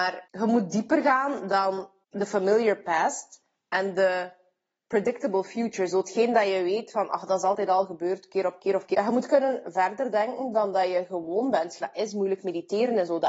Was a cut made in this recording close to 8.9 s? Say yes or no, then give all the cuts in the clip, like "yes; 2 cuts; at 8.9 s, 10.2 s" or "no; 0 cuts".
yes; 2 cuts; at 8.9 s, 11.8 s